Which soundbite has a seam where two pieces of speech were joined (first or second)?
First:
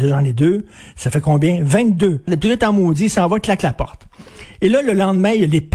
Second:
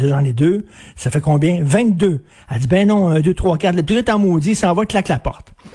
first